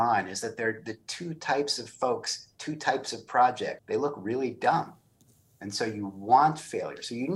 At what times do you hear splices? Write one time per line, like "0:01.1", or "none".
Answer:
0:03.8